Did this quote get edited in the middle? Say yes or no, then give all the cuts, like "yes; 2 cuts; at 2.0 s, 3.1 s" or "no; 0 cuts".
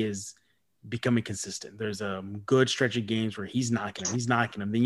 no; 0 cuts